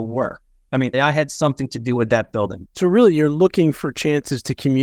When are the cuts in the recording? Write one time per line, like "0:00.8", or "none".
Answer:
0:00.9
0:02.6